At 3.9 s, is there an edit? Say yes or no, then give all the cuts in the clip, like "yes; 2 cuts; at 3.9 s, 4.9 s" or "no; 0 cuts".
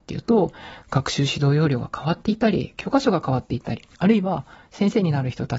yes; 1 cut; at 3.9 s